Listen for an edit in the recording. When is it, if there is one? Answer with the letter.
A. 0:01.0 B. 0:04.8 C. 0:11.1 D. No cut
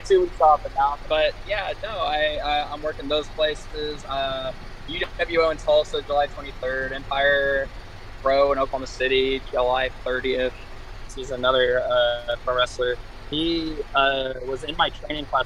C